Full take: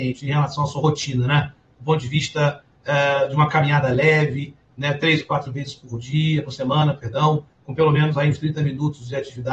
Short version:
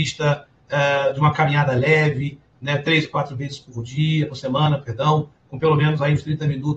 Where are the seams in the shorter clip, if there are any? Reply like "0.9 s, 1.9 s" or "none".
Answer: none